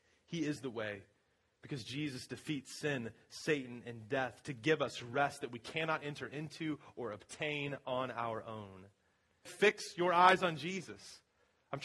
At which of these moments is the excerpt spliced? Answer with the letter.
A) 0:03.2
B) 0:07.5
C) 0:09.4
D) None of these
C